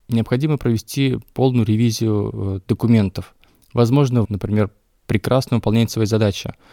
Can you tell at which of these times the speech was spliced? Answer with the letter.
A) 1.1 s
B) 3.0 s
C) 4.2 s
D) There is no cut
C